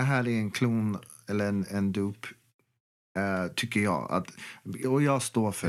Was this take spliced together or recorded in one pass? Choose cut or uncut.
uncut